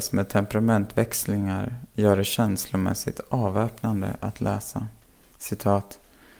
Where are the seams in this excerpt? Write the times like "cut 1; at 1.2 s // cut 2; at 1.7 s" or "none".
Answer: none